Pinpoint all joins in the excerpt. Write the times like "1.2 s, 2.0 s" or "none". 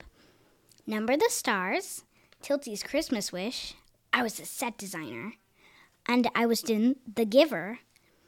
6.6 s